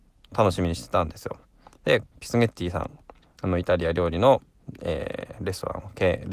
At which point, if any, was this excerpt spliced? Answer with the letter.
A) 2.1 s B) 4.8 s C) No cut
A